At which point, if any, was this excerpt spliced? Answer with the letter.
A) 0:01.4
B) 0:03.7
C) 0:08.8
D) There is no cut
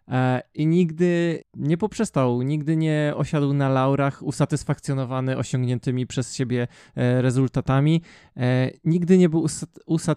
A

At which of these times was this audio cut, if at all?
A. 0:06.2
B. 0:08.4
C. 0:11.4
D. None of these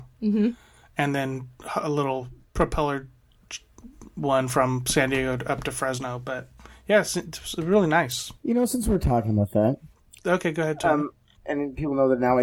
C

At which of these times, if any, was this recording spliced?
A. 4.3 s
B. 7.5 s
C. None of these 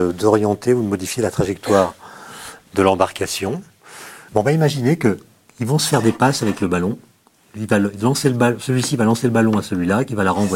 A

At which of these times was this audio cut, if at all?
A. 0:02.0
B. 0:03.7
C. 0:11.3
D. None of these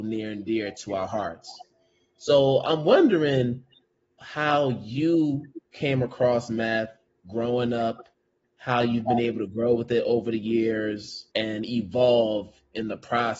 C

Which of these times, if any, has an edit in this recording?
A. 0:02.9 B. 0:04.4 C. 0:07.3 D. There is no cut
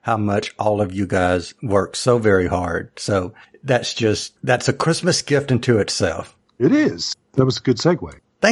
B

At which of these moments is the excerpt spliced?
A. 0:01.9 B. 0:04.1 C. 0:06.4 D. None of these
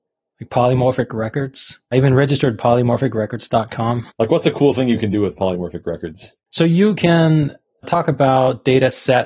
B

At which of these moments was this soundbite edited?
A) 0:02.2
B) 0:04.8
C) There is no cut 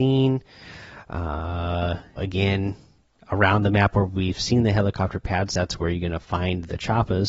A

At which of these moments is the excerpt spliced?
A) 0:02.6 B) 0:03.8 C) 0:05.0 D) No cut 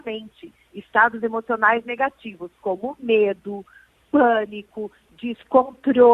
D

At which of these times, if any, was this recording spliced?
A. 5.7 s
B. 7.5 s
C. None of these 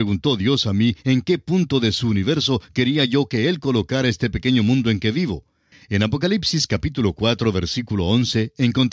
A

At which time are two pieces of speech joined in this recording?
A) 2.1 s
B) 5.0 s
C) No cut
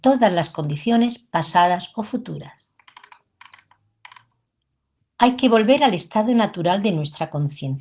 B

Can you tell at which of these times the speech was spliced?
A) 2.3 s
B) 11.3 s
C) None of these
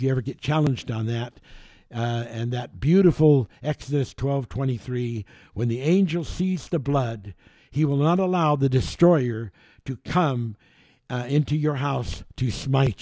C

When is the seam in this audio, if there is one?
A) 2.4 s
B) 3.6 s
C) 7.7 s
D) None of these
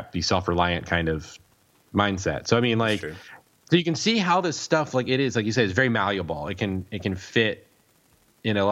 D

